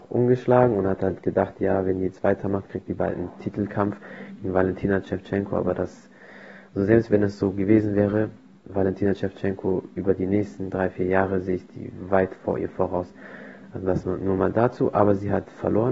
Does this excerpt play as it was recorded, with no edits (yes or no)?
yes